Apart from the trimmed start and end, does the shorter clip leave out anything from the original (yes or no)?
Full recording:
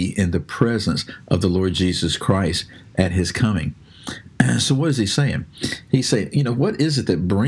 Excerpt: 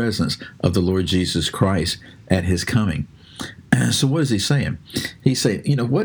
no